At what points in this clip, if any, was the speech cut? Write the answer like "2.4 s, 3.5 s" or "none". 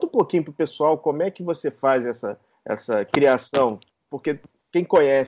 none